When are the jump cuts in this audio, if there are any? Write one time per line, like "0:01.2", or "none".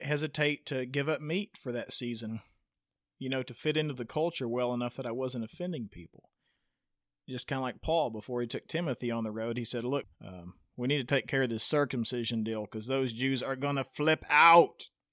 0:10.0